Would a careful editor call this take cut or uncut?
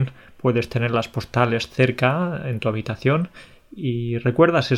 uncut